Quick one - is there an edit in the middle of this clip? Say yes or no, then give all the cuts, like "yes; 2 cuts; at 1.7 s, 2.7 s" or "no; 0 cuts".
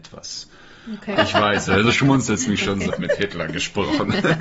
yes; 2 cuts; at 1.2 s, 2.9 s